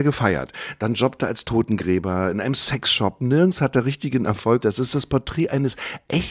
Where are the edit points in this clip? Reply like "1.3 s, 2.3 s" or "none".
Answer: 4.6 s